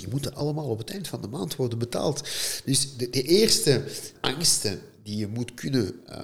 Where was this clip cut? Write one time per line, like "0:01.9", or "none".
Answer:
none